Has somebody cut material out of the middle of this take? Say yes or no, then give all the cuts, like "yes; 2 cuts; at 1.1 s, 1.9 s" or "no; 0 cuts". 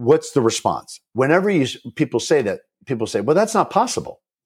no; 0 cuts